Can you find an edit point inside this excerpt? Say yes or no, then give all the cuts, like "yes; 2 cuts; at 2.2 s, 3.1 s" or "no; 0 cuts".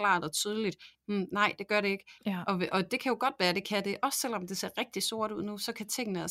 yes; 2 cuts; at 0.9 s, 2.2 s